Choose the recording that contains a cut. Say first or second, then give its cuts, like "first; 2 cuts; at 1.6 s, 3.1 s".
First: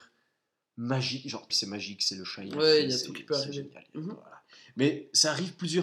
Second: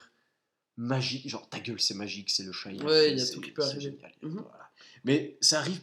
first; 1 cut; at 1.5 s